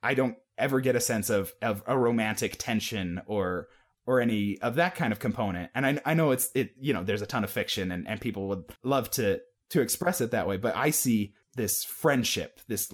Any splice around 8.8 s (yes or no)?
yes